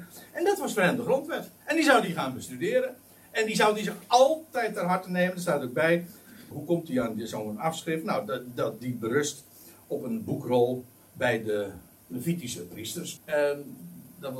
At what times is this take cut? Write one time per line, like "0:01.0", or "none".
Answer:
0:06.5
0:13.2